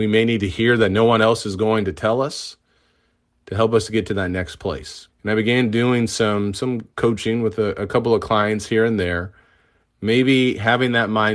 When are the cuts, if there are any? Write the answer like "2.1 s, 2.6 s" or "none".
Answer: 5.1 s, 9.8 s